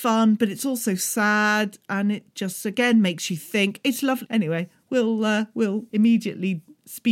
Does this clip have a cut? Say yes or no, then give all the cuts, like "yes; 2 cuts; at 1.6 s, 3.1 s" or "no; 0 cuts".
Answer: yes; 2 cuts; at 4.3 s, 5.9 s